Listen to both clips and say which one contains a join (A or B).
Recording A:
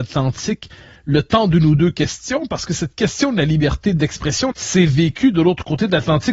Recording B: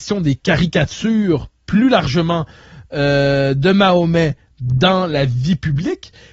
A